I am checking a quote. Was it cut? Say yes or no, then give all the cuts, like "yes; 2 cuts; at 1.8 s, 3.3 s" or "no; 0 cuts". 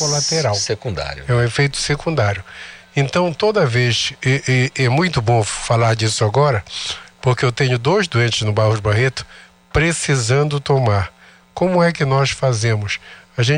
no; 0 cuts